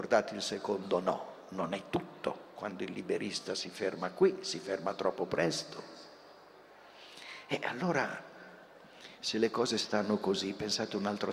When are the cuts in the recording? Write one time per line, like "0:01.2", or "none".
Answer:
none